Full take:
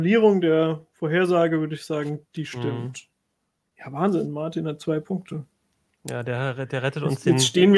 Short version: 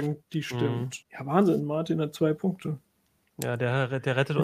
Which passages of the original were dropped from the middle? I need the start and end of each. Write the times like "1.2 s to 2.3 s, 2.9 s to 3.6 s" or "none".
3.0 s to 3.7 s